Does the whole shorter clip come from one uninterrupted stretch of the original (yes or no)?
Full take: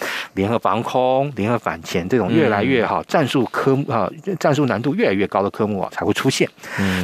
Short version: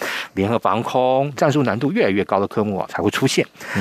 no